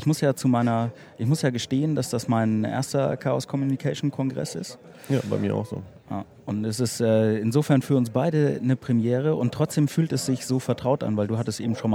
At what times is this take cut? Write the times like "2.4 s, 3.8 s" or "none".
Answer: none